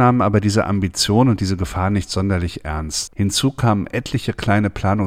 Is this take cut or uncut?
cut